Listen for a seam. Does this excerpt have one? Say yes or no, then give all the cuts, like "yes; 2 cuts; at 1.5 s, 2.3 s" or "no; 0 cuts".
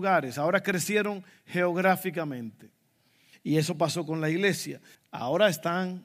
yes; 2 cuts; at 3.3 s, 5.0 s